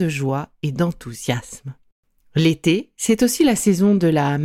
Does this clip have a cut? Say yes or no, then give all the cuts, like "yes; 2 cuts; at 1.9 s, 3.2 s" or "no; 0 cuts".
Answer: no; 0 cuts